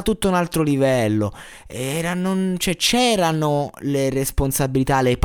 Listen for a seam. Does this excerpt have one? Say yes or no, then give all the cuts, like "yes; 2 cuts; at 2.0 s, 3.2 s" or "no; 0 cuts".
no; 0 cuts